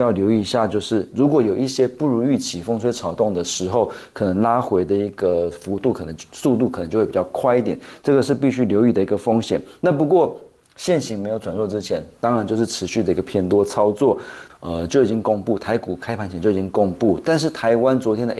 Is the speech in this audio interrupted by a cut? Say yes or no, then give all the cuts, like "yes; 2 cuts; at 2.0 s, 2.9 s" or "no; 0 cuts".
yes; 1 cut; at 14.5 s